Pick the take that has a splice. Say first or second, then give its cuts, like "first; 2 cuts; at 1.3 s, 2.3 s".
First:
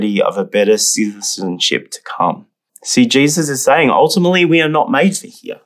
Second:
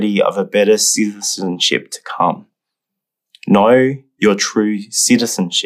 first; 1 cut; at 2.7 s